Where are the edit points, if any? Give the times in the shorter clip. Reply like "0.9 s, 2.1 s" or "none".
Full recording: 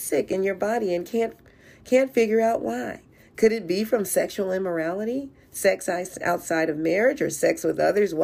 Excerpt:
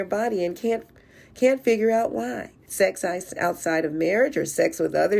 2.7 s